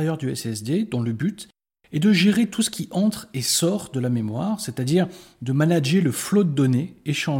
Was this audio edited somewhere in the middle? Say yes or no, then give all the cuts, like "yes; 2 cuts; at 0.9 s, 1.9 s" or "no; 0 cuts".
no; 0 cuts